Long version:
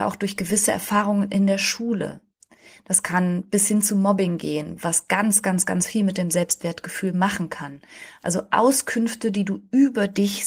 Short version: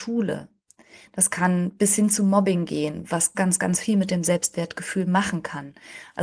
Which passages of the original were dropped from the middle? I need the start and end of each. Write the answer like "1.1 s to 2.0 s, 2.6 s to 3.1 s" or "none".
5.1 s to 5.4 s

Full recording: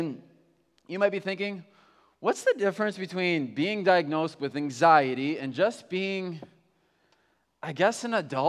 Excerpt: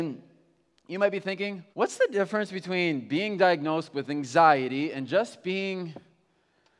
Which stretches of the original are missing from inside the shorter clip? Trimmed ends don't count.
1.7 s to 2.2 s

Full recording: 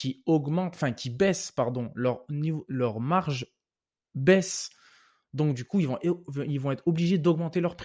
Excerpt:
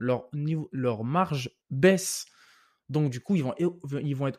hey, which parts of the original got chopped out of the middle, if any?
3.6 s to 4.0 s

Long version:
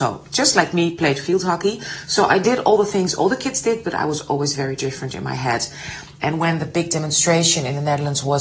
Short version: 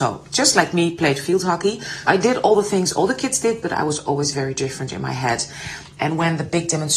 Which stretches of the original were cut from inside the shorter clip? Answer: 2.1 s to 2.3 s

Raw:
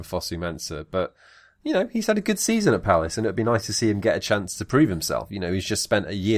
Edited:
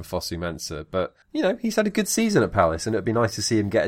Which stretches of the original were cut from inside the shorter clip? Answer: 1.2 s to 1.5 s

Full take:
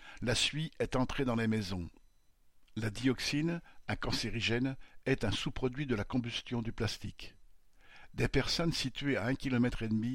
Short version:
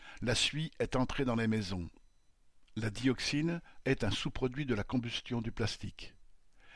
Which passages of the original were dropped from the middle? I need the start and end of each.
3.8 s to 5.0 s

